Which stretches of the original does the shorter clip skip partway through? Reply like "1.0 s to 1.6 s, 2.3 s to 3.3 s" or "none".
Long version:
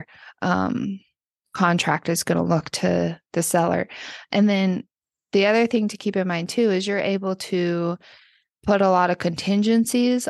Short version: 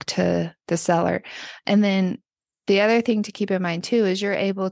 none